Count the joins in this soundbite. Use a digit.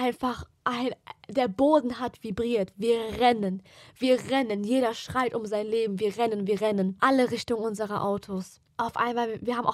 0